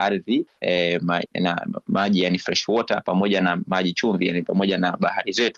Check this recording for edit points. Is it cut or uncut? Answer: uncut